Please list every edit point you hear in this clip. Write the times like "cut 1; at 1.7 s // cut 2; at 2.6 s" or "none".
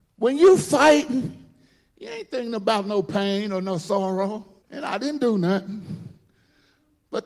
cut 1; at 4.6 s